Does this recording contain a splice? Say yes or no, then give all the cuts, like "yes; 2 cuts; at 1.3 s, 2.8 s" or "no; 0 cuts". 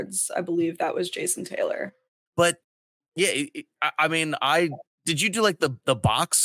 yes; 1 cut; at 2.2 s